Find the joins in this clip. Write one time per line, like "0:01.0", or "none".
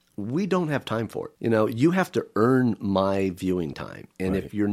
0:01.4